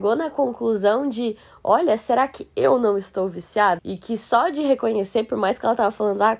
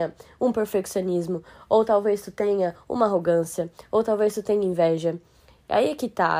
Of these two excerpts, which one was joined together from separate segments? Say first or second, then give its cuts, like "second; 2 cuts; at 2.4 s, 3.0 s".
first; 1 cut; at 3.8 s